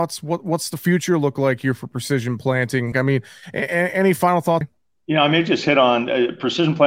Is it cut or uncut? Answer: cut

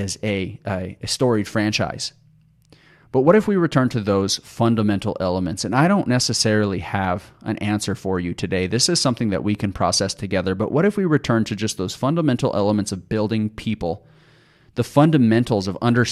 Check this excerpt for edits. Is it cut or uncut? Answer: uncut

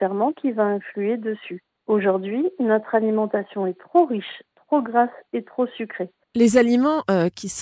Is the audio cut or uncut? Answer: cut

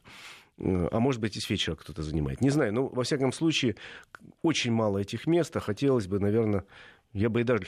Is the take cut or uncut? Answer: uncut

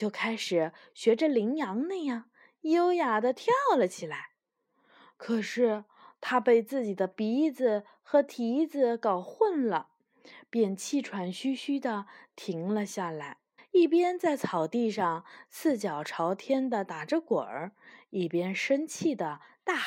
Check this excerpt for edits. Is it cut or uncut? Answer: cut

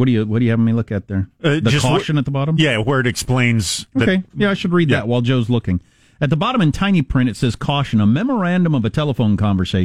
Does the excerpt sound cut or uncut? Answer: uncut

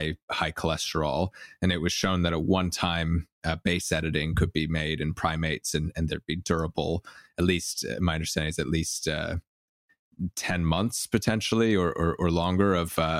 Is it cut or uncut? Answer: uncut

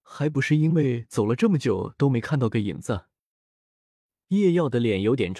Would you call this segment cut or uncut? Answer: uncut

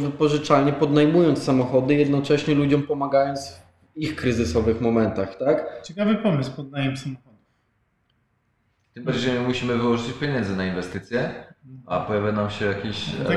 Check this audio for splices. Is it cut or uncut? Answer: uncut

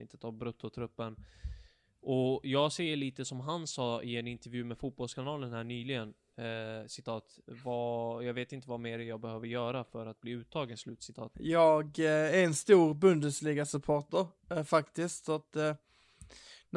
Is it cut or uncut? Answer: cut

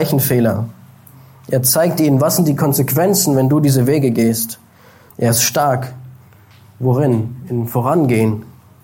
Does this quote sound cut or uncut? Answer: cut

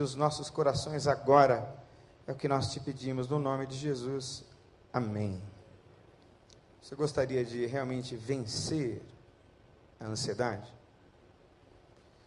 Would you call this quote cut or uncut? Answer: uncut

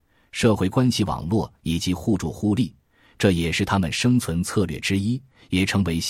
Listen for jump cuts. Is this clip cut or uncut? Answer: uncut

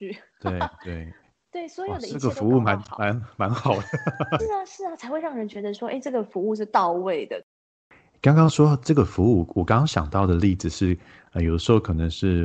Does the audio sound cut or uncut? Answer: cut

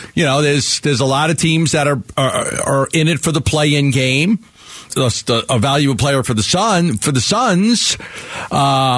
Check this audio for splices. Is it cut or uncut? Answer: cut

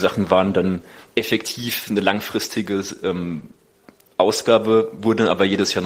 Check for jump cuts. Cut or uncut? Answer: uncut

